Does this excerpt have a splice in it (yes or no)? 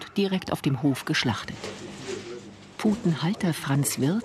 no